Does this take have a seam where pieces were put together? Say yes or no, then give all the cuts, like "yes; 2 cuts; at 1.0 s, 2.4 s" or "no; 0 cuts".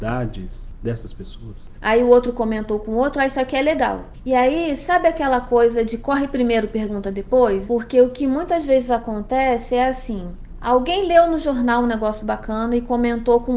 yes; 2 cuts; at 1.8 s, 7.7 s